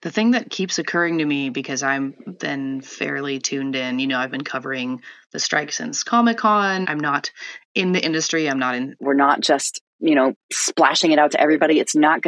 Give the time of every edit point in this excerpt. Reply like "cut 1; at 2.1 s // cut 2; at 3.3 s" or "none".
cut 1; at 6.8 s // cut 2; at 9.0 s